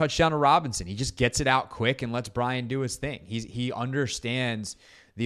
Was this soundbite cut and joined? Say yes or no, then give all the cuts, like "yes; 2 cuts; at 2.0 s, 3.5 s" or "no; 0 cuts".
no; 0 cuts